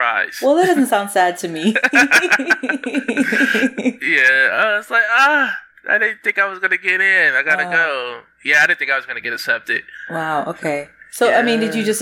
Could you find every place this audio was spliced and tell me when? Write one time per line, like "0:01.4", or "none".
none